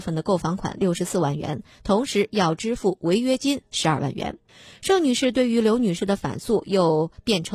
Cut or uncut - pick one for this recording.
uncut